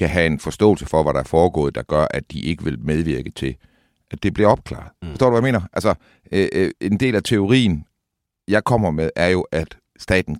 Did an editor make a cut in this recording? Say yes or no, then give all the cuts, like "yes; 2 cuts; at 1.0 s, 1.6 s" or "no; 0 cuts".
yes; 1 cut; at 5.0 s